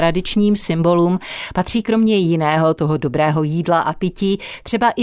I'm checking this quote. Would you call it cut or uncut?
uncut